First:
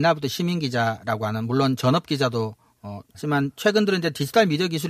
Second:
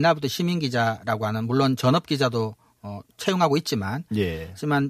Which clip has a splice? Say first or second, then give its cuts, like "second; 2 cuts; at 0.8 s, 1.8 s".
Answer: first; 1 cut; at 3.1 s